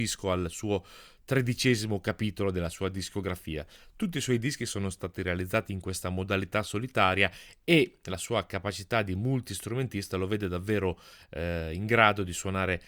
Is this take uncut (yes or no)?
yes